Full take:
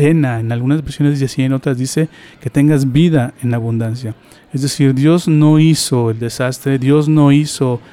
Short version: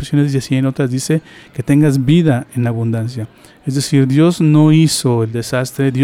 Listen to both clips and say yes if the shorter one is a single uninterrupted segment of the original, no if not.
yes